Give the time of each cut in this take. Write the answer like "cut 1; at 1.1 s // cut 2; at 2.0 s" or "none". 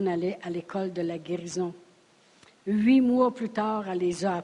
cut 1; at 2.6 s